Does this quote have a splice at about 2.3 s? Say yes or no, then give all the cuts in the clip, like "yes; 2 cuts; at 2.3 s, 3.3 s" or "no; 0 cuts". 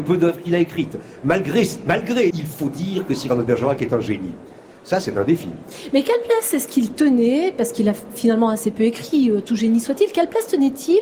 yes; 1 cut; at 2.3 s